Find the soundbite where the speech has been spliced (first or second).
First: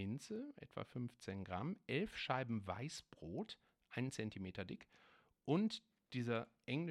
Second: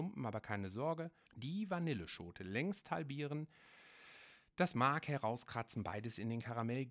second